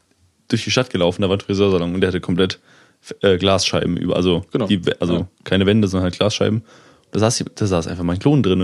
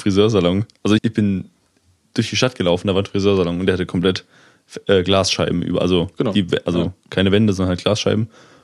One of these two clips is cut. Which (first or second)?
second